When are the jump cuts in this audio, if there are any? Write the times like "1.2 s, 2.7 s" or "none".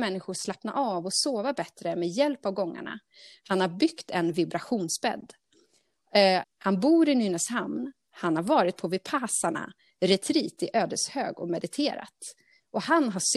6.4 s